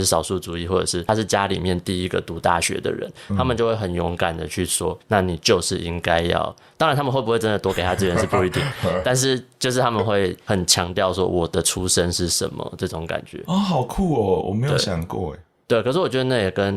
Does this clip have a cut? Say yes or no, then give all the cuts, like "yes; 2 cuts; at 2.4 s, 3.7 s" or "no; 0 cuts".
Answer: yes; 1 cut; at 5.0 s